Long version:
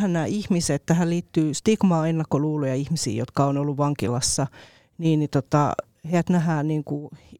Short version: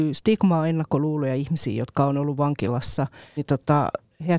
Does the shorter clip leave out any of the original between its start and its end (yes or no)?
yes